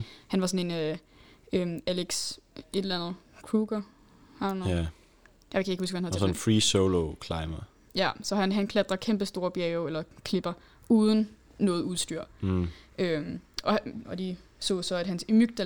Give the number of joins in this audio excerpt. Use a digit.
1